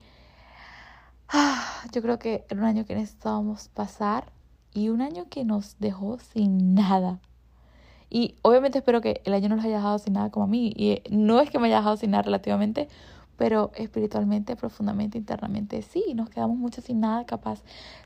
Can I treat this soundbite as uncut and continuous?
yes; 0 cuts

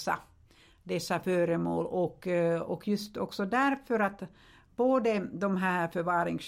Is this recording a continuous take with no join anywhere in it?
yes; 0 cuts

